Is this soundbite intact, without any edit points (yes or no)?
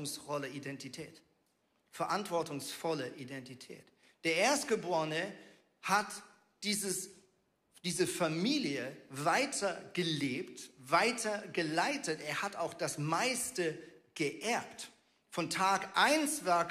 yes